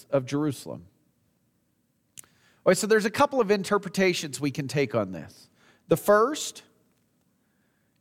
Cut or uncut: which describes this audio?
uncut